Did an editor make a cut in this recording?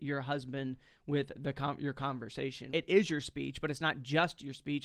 yes; 1 cut; at 2.7 s

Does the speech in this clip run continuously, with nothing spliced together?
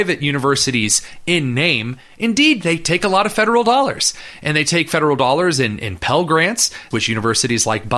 no; 1 cut; at 6.9 s

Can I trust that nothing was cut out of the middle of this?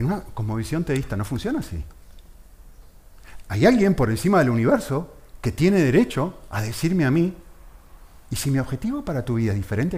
yes; 0 cuts

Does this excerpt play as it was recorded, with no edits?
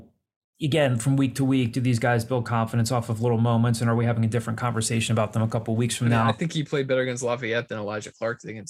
yes; 0 cuts

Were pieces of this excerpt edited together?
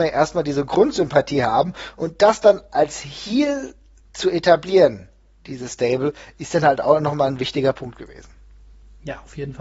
no; 0 cuts

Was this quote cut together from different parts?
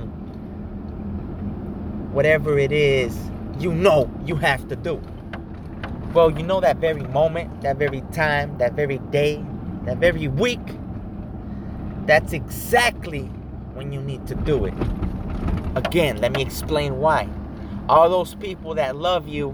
yes; 1 cut; at 15.7 s

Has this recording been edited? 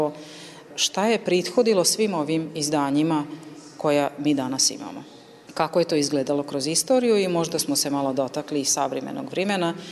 no; 0 cuts

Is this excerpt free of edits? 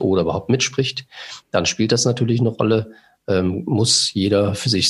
yes; 0 cuts

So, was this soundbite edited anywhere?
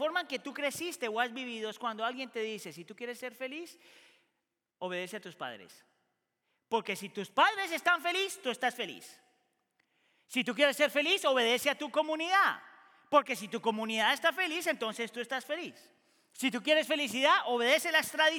no; 0 cuts

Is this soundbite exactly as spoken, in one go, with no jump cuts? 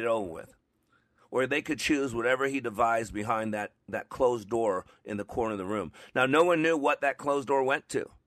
yes; 0 cuts

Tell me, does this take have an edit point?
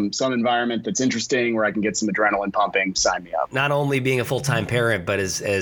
yes; 1 cut; at 3.5 s

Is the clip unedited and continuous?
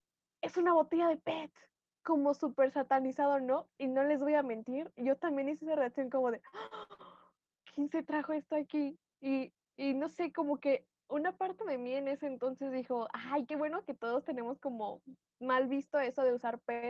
yes; 0 cuts

